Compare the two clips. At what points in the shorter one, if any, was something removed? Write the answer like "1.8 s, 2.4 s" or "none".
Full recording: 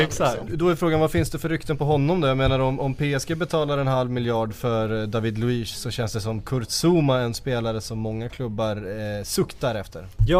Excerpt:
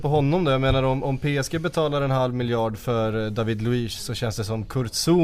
none